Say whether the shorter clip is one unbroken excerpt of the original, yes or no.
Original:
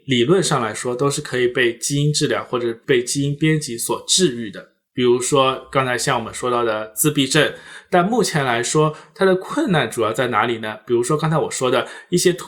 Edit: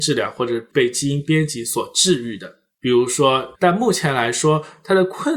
no